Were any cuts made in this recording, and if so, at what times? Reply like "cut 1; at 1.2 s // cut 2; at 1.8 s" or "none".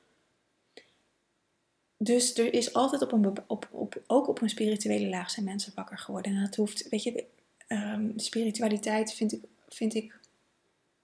none